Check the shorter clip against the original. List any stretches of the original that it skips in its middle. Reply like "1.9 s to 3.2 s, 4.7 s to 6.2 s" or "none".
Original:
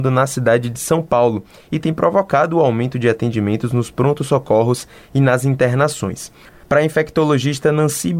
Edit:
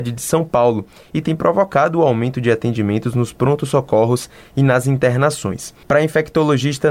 6.4 s to 6.6 s